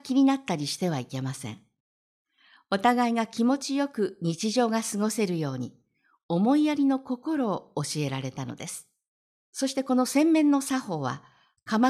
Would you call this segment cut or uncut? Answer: cut